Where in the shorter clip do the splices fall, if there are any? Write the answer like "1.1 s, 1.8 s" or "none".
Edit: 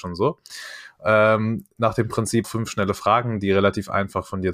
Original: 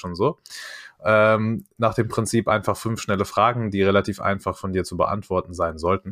2.4 s